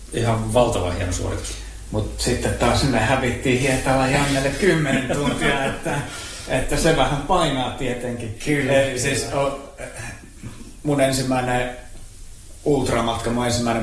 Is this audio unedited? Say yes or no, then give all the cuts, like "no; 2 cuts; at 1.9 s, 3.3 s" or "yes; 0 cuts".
yes; 0 cuts